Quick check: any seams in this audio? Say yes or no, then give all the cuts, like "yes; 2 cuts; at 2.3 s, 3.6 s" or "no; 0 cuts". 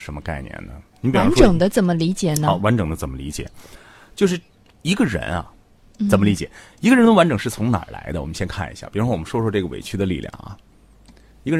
yes; 1 cut; at 5.8 s